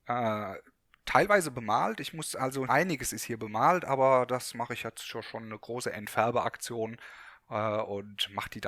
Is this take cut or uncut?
cut